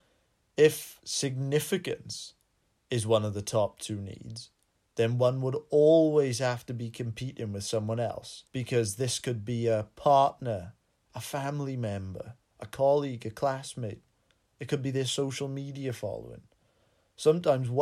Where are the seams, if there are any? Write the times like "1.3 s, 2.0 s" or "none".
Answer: 8.5 s